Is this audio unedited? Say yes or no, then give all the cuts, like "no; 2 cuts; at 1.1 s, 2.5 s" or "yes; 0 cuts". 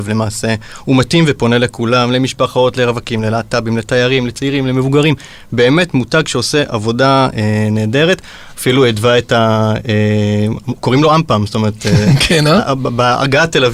yes; 0 cuts